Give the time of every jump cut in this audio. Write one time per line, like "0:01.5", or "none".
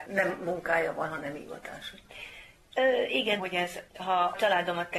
0:03.4